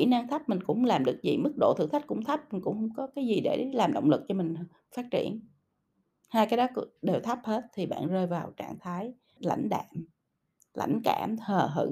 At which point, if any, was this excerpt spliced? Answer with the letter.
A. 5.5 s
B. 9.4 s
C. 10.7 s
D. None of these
B